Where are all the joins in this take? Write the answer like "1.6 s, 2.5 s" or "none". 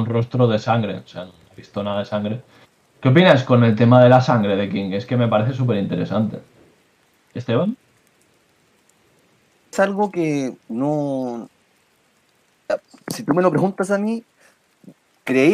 none